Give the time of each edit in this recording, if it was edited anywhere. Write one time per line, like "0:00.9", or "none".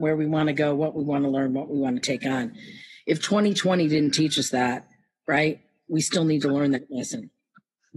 none